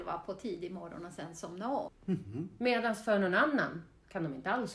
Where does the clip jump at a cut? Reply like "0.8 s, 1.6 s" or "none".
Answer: 1.9 s